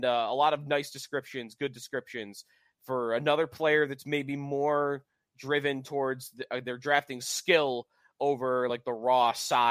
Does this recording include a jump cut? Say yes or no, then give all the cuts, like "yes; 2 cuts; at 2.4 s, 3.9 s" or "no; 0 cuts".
no; 0 cuts